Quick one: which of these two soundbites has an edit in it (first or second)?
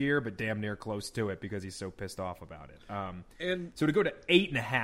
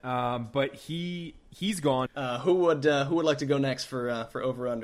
second